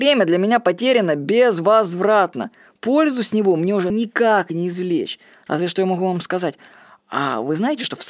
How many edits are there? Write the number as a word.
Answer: one